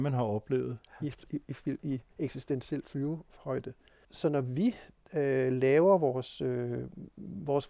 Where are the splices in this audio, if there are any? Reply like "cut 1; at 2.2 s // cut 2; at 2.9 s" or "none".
cut 1; at 1.0 s